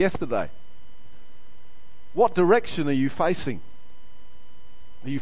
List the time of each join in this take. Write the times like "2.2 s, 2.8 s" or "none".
none